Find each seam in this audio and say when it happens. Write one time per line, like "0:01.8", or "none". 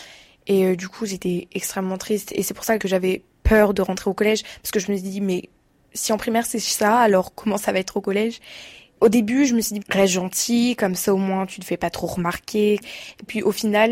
0:09.8